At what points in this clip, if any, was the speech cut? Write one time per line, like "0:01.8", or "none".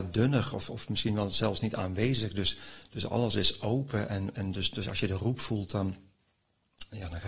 none